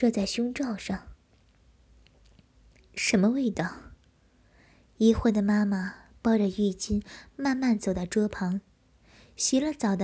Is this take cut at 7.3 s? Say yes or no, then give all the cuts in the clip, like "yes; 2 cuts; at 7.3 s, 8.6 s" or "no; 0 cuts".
no; 1 cut; at 2.8 s